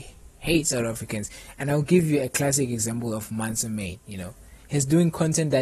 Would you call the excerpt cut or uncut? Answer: uncut